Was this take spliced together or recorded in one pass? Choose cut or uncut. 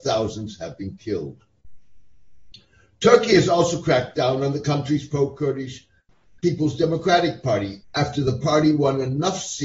cut